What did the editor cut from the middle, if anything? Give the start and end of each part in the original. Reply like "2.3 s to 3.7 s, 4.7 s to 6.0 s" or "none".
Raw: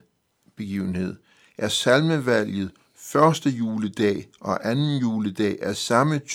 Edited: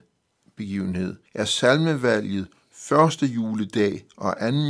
1.3 s to 1.5 s